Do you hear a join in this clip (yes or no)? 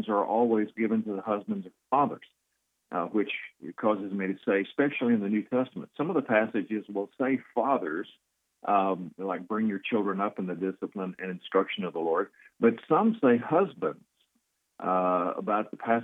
no